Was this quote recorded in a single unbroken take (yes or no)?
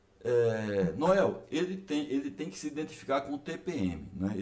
yes